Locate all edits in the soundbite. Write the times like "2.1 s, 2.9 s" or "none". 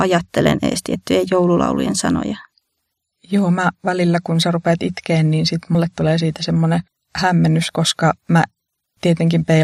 none